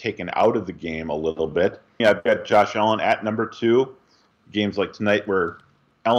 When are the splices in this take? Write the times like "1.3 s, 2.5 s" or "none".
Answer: 2.0 s, 4.3 s